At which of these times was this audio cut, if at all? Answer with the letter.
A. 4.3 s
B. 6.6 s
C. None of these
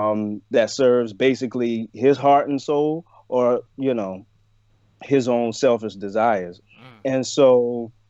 B